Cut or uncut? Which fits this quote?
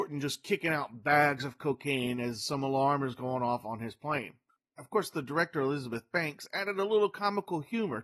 uncut